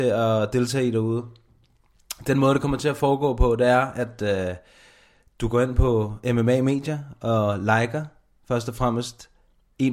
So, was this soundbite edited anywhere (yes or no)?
no